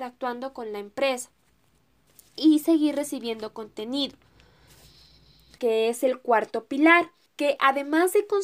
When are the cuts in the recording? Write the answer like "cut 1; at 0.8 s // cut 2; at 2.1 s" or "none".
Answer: cut 1; at 5.6 s // cut 2; at 7.3 s